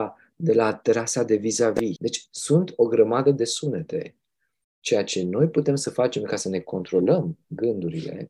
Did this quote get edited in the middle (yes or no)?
no